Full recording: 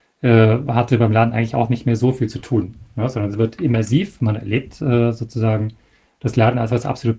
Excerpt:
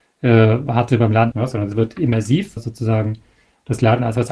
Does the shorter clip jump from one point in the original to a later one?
yes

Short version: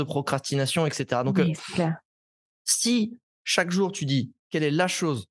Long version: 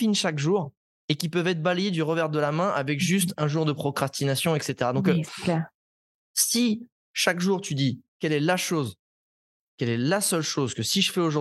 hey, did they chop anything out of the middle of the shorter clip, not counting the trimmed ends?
no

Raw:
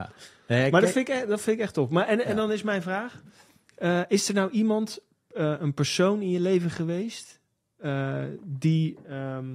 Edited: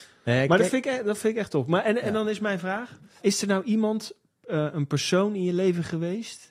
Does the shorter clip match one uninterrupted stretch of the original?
no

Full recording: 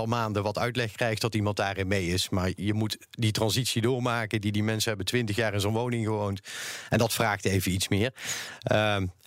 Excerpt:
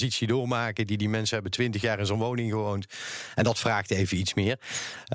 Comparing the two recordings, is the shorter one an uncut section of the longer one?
yes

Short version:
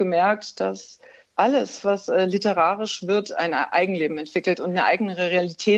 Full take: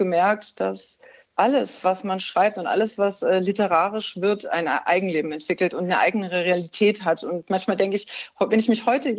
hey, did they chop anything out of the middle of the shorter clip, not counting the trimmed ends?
yes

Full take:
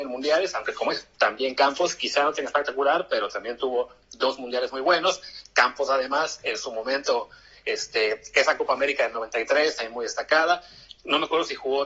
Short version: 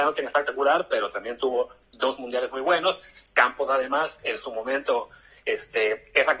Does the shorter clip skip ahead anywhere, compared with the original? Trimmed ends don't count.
no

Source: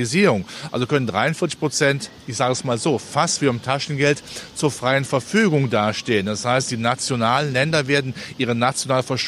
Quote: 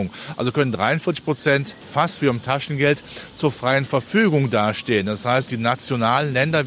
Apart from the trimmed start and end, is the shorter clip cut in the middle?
yes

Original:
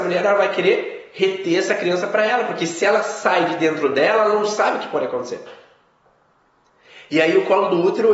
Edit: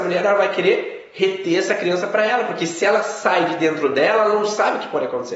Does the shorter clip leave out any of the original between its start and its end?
no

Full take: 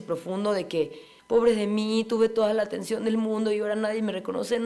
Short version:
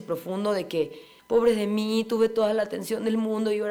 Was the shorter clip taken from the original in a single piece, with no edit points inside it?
yes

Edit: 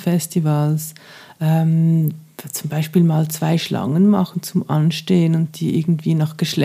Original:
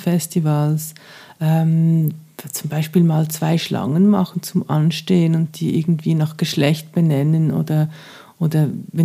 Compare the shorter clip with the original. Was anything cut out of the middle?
no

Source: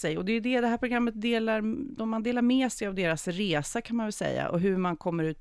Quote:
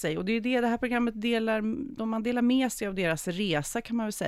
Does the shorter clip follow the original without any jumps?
yes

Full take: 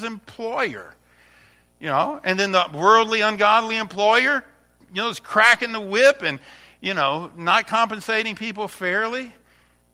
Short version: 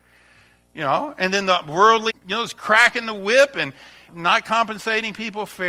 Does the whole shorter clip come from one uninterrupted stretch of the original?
no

